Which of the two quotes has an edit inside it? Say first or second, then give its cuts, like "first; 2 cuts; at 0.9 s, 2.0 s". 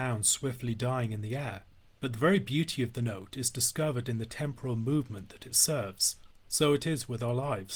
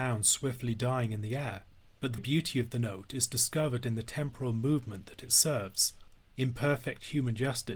second; 2 cuts; at 2.2 s, 6.2 s